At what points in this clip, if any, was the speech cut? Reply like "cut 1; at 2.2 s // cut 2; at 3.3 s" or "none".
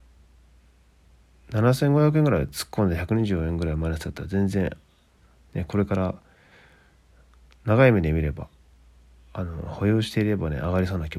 none